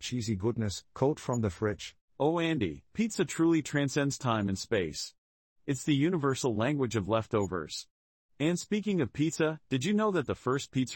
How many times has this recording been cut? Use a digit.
0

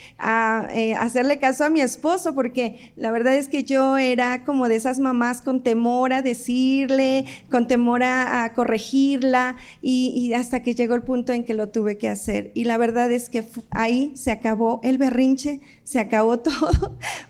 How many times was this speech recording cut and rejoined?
0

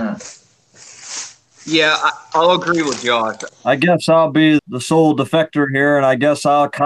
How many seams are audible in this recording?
3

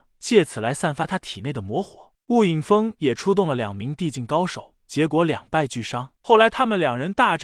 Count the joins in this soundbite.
2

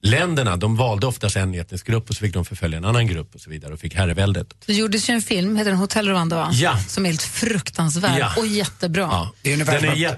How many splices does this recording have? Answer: 1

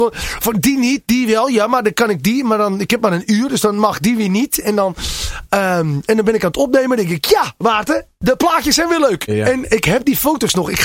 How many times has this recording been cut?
1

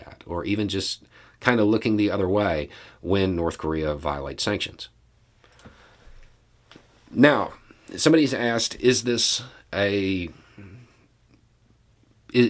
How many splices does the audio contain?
0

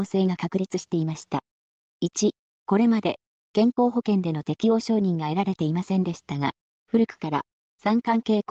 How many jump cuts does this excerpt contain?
2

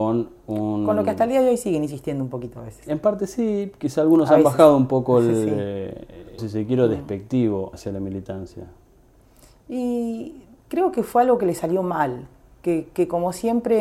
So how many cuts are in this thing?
2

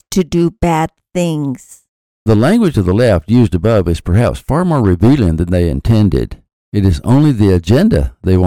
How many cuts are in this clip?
0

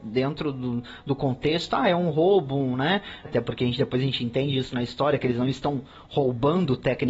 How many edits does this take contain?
1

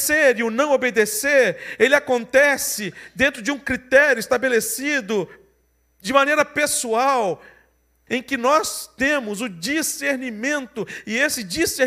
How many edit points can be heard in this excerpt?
1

